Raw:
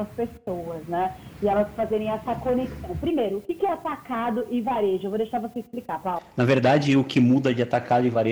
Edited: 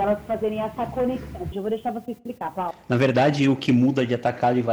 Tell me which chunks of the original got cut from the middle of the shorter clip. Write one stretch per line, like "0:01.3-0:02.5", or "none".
0:03.0-0:05.0